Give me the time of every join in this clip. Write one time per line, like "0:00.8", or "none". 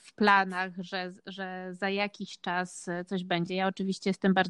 none